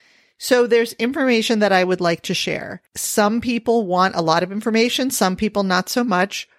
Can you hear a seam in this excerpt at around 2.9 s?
yes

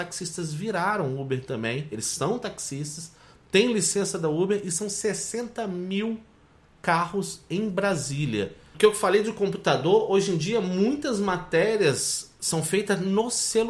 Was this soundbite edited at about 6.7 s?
no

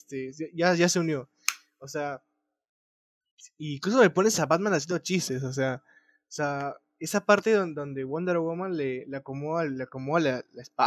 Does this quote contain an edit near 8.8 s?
no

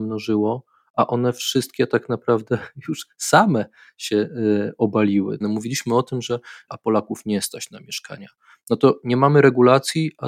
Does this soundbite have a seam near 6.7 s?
yes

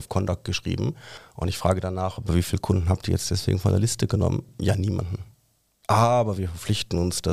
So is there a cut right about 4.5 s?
no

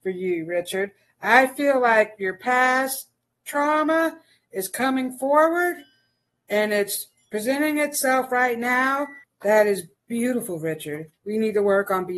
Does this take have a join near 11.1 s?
yes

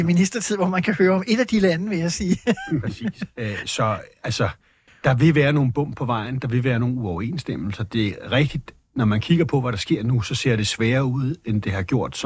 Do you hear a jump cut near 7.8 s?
no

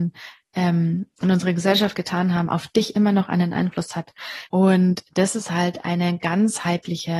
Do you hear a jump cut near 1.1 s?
no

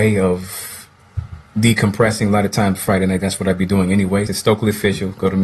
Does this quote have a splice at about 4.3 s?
yes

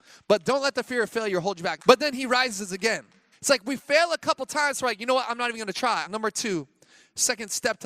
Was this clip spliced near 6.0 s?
yes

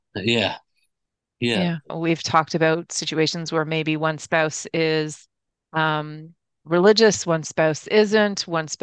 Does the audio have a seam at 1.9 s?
yes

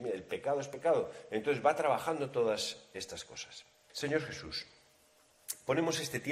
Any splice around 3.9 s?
yes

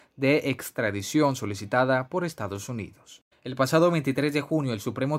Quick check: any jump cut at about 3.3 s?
yes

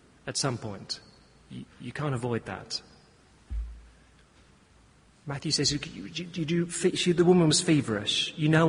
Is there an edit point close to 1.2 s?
no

